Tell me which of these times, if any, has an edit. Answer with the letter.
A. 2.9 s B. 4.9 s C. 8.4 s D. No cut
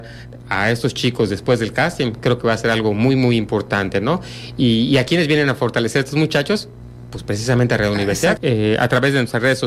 C